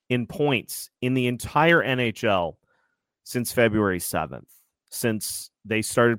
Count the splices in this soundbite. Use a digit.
0